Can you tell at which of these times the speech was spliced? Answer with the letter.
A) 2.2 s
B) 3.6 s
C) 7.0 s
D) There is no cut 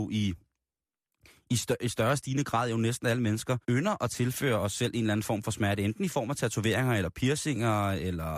B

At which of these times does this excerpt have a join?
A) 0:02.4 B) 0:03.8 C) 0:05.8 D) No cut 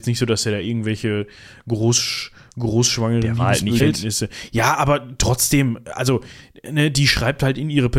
B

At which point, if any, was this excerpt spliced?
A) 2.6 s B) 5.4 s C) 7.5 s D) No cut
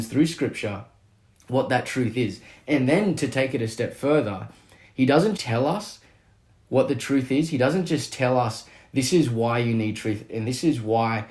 B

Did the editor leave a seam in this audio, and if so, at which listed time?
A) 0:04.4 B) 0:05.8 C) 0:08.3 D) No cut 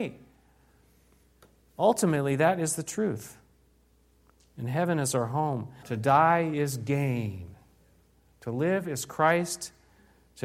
B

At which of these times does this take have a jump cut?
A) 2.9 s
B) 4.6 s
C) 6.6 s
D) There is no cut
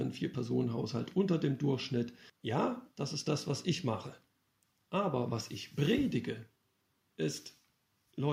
D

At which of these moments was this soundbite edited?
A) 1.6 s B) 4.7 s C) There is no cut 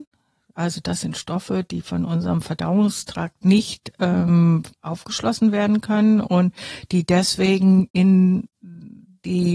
B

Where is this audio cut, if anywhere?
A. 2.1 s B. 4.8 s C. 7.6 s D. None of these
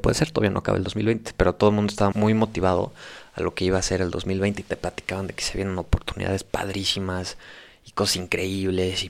A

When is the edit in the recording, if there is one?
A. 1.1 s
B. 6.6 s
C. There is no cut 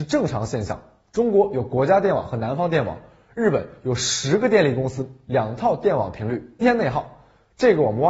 B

